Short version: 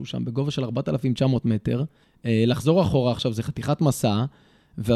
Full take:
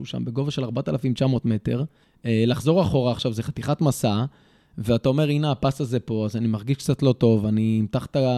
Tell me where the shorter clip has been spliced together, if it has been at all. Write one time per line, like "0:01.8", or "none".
none